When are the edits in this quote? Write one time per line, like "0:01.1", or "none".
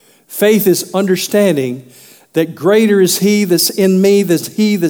none